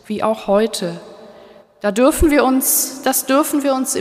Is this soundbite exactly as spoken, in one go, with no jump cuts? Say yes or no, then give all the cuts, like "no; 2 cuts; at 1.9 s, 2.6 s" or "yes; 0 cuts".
yes; 0 cuts